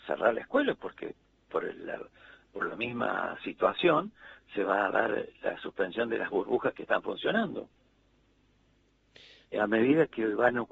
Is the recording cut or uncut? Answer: cut